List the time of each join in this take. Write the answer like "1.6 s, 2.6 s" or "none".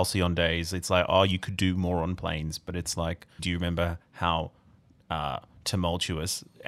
3.4 s